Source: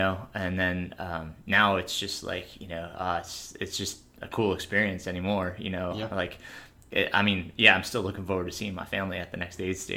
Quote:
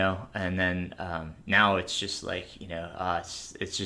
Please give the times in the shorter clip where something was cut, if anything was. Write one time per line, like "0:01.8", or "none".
none